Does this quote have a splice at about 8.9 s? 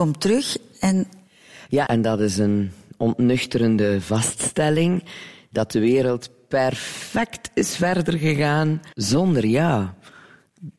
yes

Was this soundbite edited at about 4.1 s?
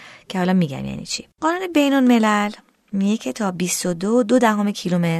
no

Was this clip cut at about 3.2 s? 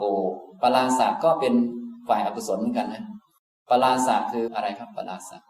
no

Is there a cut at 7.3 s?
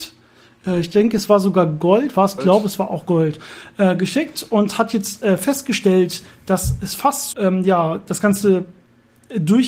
yes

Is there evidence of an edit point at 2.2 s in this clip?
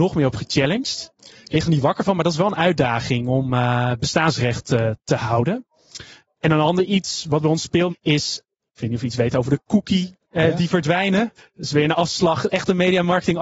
no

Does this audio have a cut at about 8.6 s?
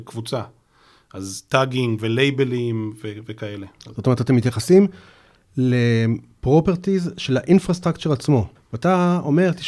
yes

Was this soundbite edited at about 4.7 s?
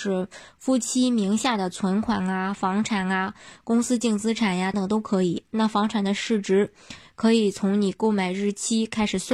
yes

